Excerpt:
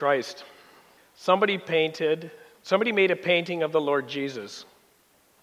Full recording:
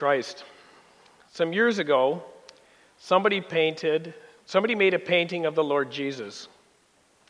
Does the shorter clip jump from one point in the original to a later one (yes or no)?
yes